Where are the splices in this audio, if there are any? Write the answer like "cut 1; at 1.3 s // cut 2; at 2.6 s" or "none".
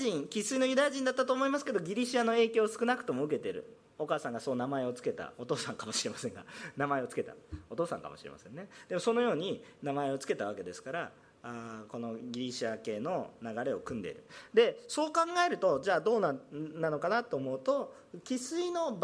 none